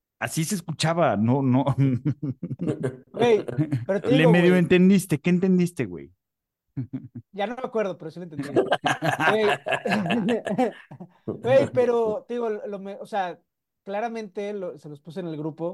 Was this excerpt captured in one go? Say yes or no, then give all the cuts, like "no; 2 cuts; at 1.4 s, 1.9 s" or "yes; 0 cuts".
yes; 0 cuts